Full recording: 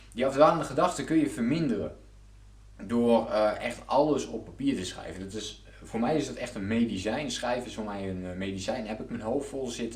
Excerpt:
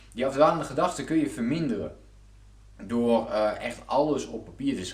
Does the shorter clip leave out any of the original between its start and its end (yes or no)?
no